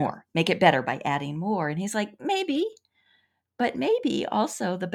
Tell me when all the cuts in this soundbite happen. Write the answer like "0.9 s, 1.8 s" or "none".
none

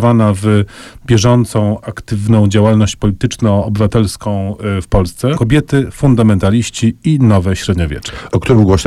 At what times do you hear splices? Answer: 5.3 s

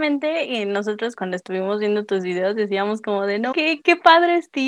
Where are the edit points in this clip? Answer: 1.1 s, 3.5 s

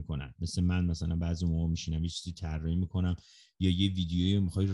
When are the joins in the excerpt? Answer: none

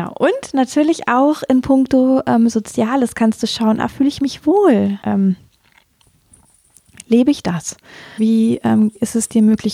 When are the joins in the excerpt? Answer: 5.0 s, 8.2 s

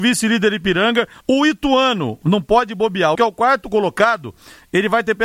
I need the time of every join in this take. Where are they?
1.2 s, 3.2 s

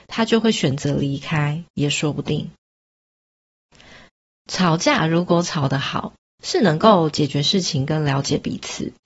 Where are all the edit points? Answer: none

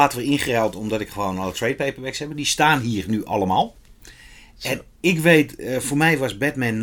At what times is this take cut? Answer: none

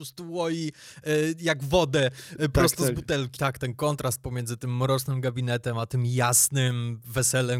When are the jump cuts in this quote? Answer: 3.4 s

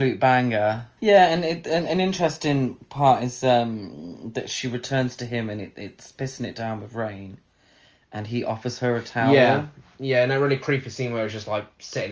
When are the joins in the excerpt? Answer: 1.0 s

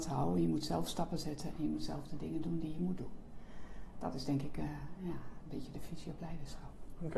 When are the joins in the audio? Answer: none

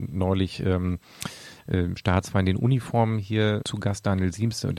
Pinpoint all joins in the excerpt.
3.6 s

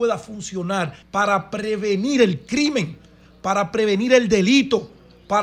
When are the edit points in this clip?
1.0 s

